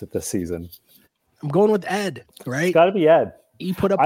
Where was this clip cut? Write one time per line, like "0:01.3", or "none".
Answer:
0:01.0
0:02.3